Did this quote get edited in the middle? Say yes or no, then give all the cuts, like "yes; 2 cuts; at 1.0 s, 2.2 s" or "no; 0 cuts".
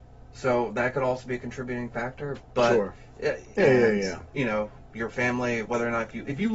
yes; 1 cut; at 3.6 s